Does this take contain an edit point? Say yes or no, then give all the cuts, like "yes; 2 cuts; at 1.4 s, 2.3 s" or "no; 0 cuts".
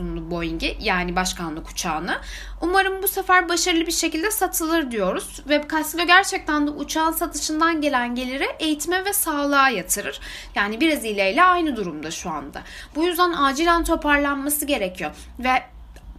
yes; 1 cut; at 10.5 s